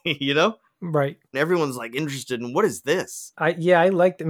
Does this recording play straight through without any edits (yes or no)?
no